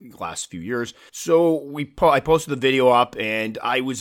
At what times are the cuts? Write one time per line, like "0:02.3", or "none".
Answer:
0:01.1